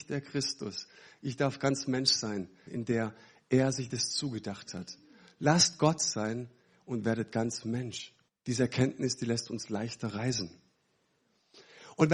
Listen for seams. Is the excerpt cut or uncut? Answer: cut